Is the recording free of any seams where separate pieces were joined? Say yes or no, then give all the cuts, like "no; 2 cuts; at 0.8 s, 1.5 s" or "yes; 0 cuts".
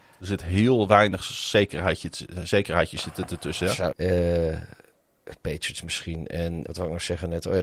no; 2 cuts; at 3.9 s, 6.7 s